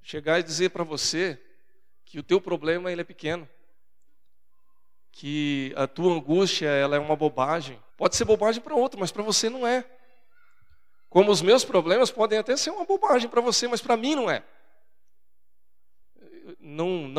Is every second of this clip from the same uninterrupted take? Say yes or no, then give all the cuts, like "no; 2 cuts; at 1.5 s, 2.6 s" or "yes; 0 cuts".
no; 2 cuts; at 7.9 s, 16.0 s